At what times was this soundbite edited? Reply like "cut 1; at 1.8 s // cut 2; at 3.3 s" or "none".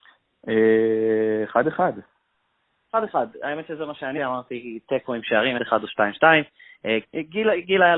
cut 1; at 4.2 s // cut 2; at 5.6 s // cut 3; at 7.0 s

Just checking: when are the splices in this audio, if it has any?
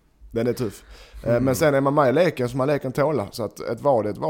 none

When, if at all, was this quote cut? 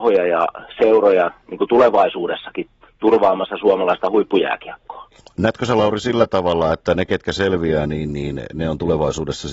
none

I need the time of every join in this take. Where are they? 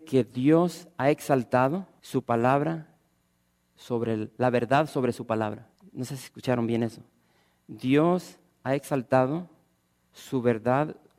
none

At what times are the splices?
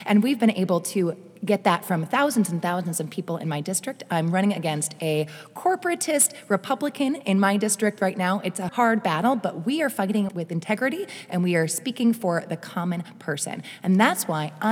cut 1; at 8.7 s // cut 2; at 10.3 s

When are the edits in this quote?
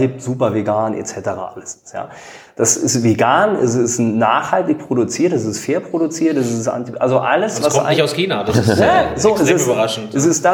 cut 1; at 2.5 s

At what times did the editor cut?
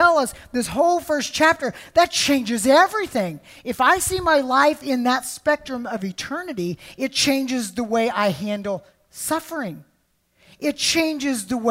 none

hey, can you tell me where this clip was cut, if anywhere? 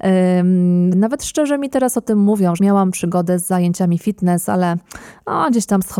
cut 1; at 0.9 s // cut 2; at 2.6 s

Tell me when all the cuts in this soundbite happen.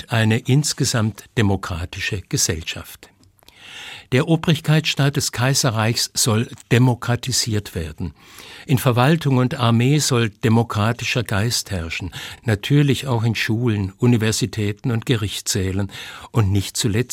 none

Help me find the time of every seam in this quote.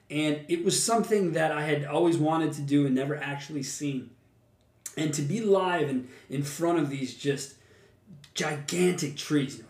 none

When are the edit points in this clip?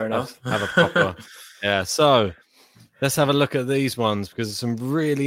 none

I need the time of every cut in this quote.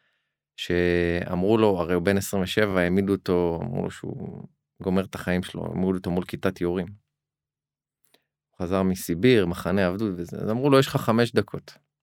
none

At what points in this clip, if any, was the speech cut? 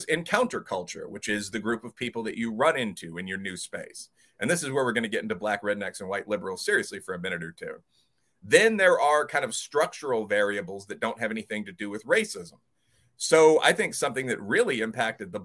none

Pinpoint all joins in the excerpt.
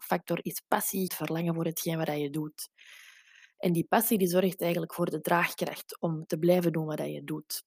cut 1; at 1.1 s

